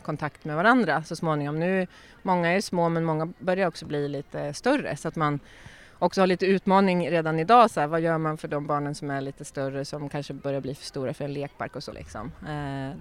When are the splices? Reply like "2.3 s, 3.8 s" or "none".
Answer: 11.9 s